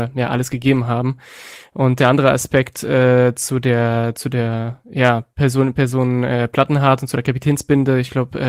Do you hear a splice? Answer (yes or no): no